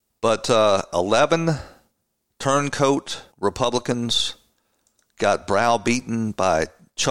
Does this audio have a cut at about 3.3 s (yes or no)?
yes